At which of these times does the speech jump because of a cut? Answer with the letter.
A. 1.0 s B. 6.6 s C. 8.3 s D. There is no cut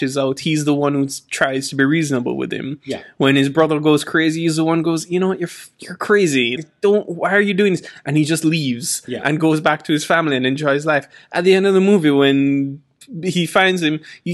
B